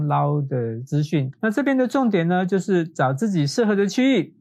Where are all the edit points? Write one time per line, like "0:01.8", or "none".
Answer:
0:01.3